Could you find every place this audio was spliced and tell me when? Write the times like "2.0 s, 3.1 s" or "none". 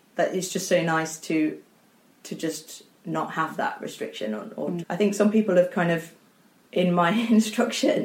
4.8 s